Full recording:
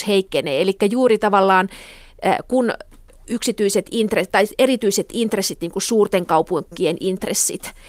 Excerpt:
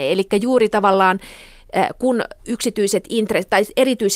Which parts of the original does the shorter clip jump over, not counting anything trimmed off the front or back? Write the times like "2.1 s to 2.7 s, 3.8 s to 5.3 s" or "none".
2.9 s to 3.2 s